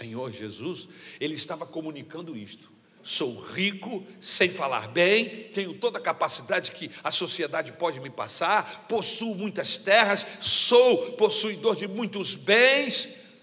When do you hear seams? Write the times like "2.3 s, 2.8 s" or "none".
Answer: 3.0 s